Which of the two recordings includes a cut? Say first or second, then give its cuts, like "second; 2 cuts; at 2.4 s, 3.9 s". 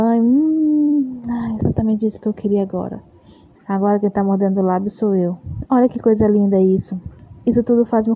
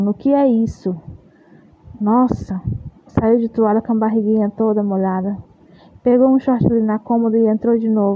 first; 2 cuts; at 3.6 s, 5.6 s